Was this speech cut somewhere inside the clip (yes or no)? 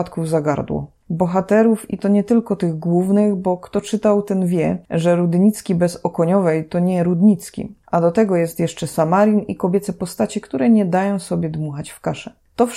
no